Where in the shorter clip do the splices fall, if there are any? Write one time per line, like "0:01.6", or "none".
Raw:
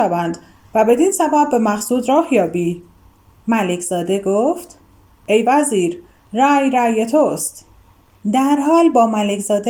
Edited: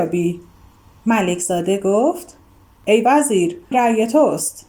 0:03.7